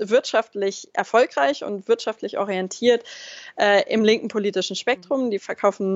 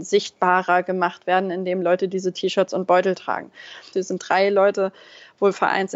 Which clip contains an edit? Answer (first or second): second